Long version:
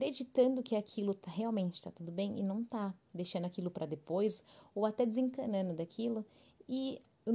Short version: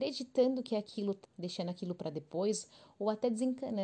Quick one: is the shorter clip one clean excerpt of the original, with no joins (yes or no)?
no